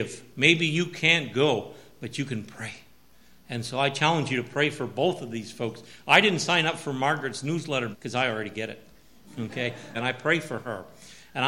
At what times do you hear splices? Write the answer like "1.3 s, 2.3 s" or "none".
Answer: 7.9 s, 9.9 s